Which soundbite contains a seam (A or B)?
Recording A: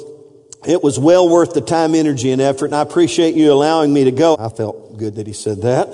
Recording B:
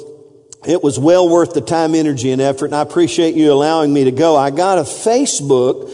A